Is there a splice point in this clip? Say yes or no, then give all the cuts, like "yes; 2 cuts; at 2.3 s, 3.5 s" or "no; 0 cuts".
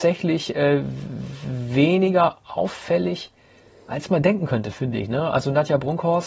no; 0 cuts